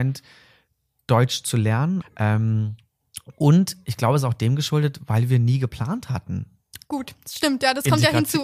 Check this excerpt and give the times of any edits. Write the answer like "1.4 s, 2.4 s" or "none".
2.0 s

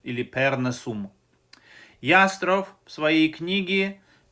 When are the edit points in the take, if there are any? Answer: none

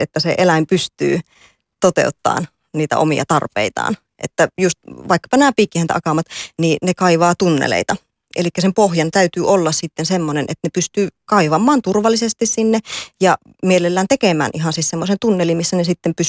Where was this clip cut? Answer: none

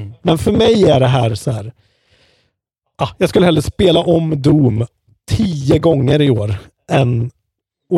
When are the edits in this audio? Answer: none

